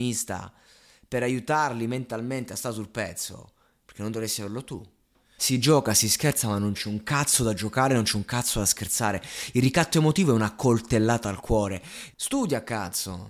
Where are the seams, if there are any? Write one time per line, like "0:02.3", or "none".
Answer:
0:05.4
0:12.1